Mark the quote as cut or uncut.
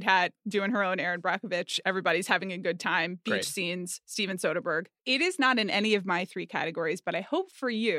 cut